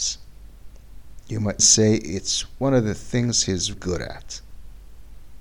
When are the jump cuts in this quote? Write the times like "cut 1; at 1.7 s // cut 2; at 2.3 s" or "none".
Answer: cut 1; at 1.6 s // cut 2; at 3.7 s